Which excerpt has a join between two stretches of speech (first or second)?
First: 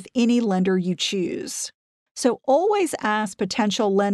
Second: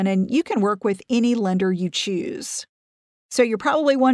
first